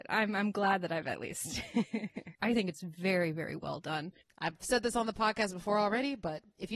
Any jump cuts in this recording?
yes; 2 cuts; at 2.3 s, 4.2 s

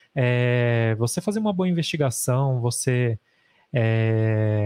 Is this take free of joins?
yes; 0 cuts

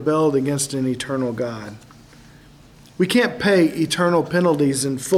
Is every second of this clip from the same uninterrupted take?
yes; 0 cuts

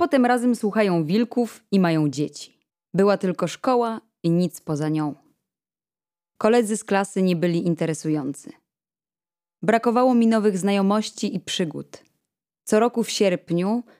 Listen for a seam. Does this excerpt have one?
yes; 1 cut; at 2.9 s

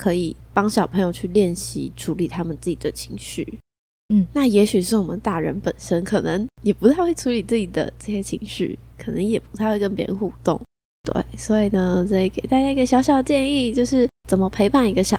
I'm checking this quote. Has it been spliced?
yes; 1 cut; at 6.5 s

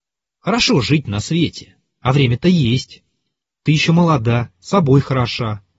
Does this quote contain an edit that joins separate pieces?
yes; 1 cut; at 2.0 s

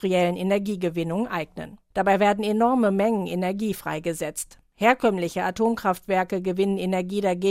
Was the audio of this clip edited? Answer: yes; 1 cut; at 1.9 s

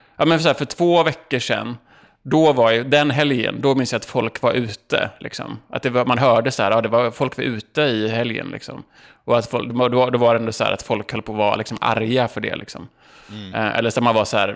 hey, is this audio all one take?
yes; 0 cuts

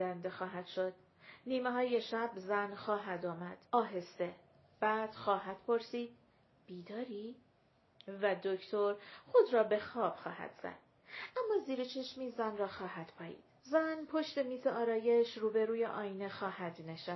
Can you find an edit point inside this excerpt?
yes; 2 cuts; at 3.7 s, 13.6 s

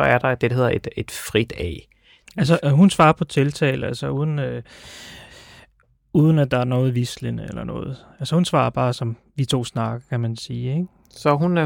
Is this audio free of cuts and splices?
no; 1 cut; at 2.3 s

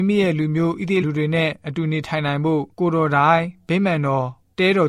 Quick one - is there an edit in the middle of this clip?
yes; 2 cuts; at 1.0 s, 2.7 s

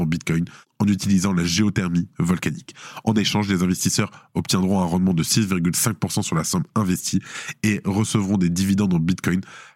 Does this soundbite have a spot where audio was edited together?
no; 0 cuts

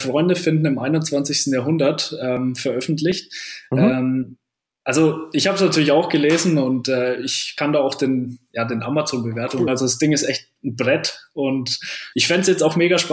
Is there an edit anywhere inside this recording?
yes; 2 cuts; at 9.7 s, 12.1 s

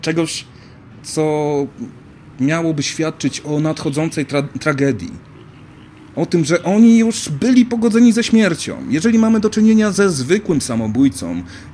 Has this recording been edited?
no; 0 cuts

